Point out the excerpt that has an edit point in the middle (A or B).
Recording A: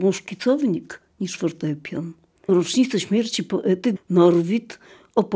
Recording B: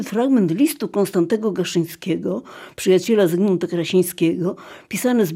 A